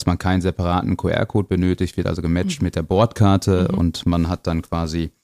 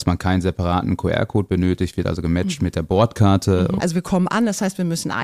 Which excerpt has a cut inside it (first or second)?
second